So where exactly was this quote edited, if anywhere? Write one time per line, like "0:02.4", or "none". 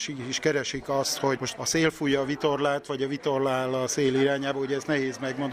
none